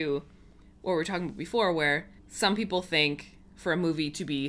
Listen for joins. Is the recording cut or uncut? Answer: cut